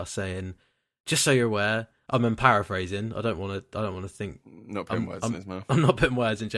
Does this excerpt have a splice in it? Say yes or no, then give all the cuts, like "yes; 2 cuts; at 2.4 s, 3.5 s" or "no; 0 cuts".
no; 0 cuts